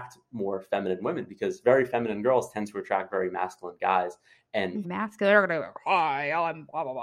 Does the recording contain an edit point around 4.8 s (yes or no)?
yes